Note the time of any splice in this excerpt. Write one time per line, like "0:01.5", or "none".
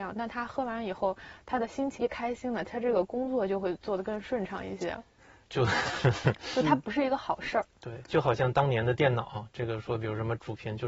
0:02.0
0:05.4
0:08.0

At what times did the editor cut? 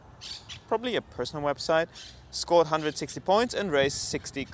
none

